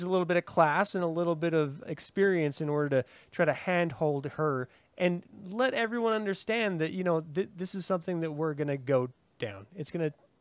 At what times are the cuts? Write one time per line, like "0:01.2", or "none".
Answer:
none